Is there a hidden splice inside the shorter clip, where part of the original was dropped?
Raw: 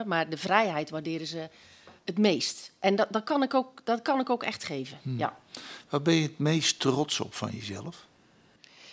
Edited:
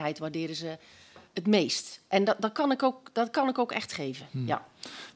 no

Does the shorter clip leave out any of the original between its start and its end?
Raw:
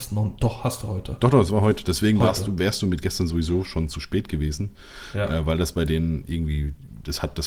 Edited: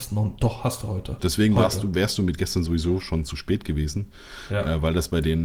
yes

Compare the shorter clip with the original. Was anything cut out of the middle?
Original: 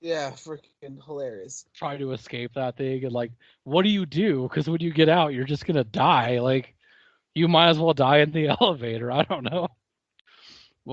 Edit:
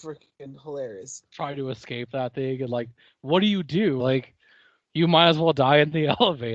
yes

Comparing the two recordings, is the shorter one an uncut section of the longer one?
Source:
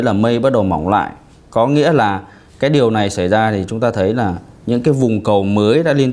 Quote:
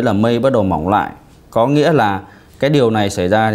yes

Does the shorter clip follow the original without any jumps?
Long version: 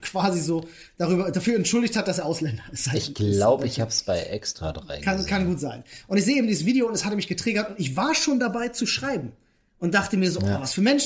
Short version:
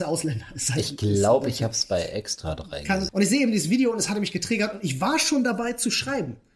no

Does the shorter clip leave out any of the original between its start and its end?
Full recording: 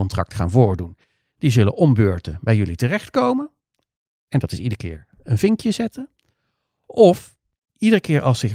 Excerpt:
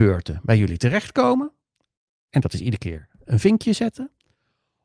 no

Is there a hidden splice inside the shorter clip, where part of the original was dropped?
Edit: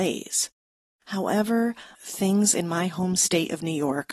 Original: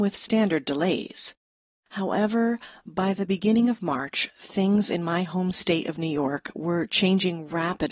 yes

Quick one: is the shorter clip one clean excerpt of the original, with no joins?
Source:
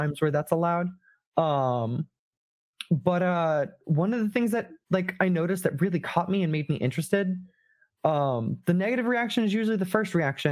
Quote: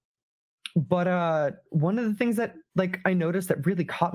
yes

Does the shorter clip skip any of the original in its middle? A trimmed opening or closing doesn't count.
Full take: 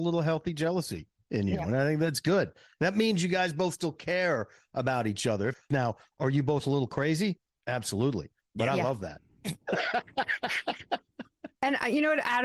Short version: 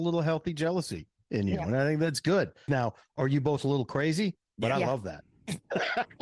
yes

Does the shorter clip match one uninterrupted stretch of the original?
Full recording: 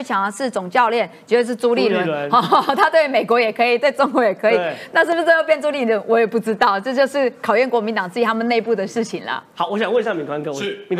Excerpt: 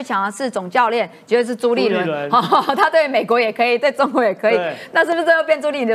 yes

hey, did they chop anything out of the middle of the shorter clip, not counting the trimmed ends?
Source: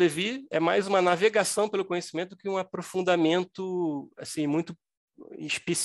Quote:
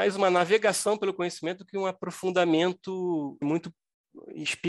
yes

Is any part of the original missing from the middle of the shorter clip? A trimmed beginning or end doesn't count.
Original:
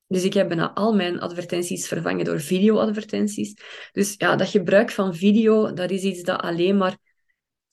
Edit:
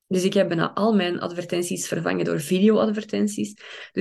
no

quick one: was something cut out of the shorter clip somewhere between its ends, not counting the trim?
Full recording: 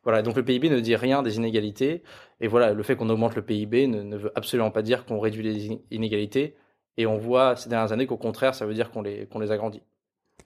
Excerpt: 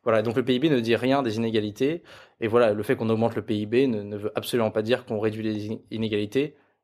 no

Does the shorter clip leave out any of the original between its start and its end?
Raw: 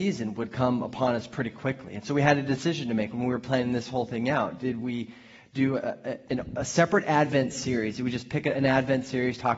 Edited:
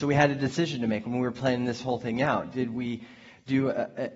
no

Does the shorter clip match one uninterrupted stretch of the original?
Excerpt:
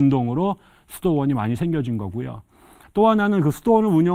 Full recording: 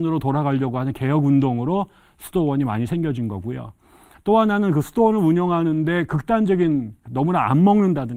yes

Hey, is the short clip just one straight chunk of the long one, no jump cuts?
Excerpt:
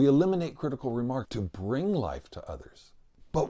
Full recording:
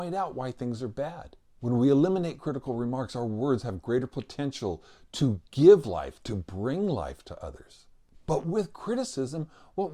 no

